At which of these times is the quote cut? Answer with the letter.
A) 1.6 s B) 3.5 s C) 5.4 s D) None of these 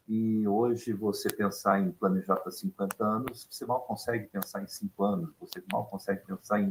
D